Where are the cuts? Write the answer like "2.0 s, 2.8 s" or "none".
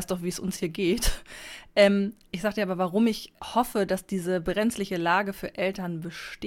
3.4 s